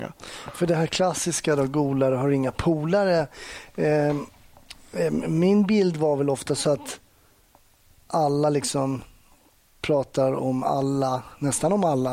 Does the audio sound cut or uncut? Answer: uncut